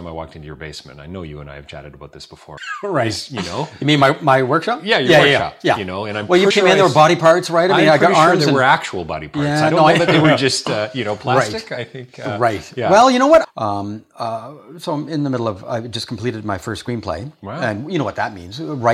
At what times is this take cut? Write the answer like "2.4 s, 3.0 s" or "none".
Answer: 2.6 s, 6.5 s, 13.4 s